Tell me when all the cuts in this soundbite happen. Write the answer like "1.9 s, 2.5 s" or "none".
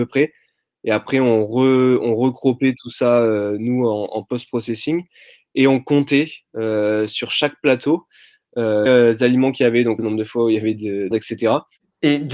8.9 s, 10.0 s, 11.1 s